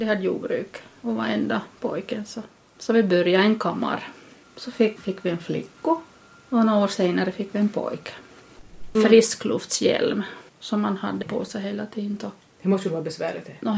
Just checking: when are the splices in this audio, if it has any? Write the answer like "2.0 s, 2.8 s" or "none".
5.0 s, 8.9 s, 10.5 s